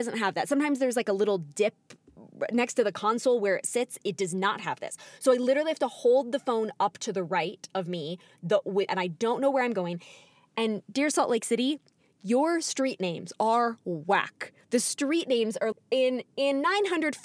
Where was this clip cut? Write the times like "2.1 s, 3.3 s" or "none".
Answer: 8.9 s, 15.7 s